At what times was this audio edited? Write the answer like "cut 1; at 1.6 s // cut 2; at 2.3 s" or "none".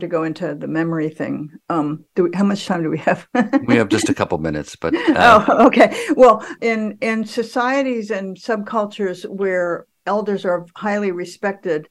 cut 1; at 6.6 s